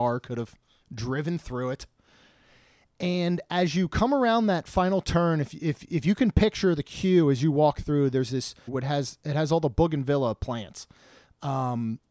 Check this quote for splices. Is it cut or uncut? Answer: cut